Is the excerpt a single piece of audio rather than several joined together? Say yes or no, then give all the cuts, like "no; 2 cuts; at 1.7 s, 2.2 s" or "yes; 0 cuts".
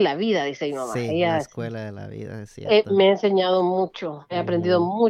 yes; 0 cuts